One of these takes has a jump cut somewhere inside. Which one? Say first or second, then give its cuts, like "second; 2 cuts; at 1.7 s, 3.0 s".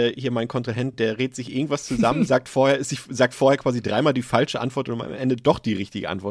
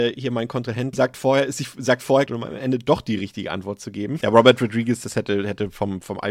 second; 3 cuts; at 0.9 s, 2.3 s, 4.2 s